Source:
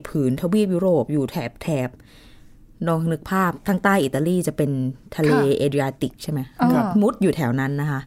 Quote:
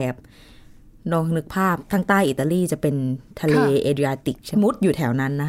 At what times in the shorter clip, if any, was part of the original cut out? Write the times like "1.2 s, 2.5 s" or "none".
4.5 s